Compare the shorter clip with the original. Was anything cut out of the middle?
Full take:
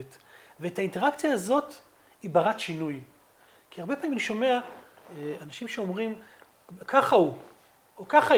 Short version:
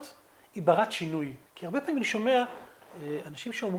yes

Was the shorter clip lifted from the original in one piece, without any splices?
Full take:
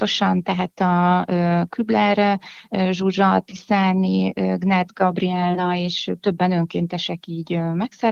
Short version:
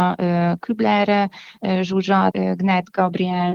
no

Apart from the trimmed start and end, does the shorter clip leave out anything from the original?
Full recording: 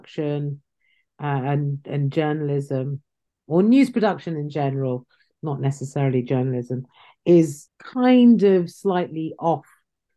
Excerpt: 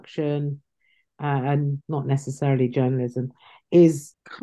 yes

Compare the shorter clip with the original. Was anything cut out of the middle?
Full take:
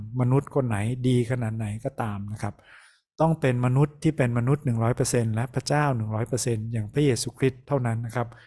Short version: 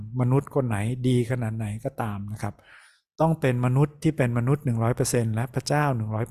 no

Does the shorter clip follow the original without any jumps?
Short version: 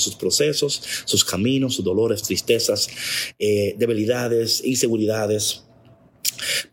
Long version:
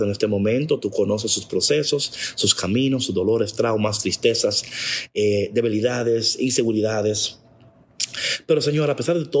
no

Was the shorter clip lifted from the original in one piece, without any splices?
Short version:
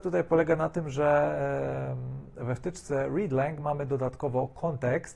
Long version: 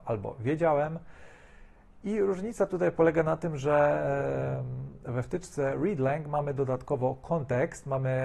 yes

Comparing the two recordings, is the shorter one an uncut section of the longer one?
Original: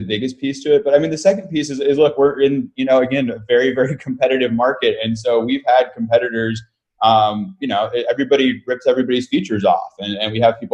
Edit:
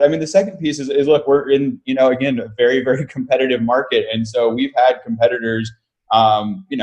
yes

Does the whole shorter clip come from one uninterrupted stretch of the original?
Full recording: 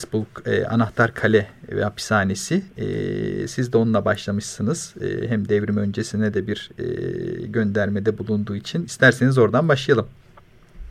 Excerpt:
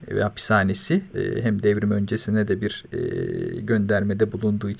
no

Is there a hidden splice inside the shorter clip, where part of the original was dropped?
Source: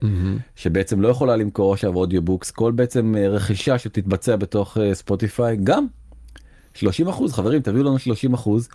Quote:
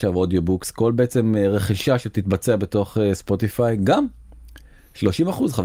no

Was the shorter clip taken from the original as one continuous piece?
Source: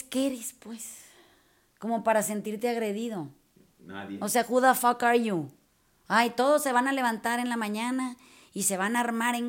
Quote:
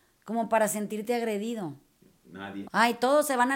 no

